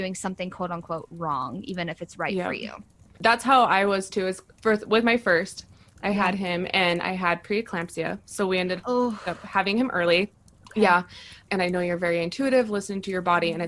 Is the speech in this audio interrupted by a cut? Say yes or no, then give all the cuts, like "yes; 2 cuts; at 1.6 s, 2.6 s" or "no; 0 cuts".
no; 0 cuts